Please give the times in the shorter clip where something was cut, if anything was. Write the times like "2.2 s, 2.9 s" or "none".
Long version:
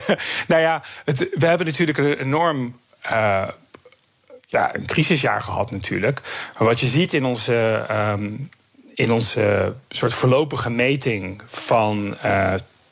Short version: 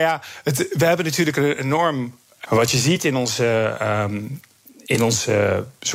2.4 s